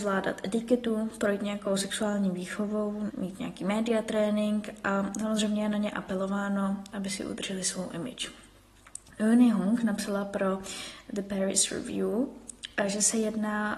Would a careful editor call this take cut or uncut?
cut